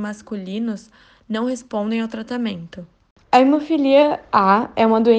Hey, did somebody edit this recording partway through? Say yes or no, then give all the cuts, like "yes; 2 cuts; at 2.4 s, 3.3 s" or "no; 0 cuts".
yes; 1 cut; at 3.2 s